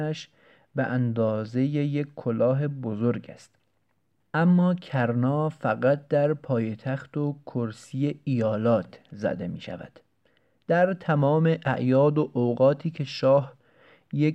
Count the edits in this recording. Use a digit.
0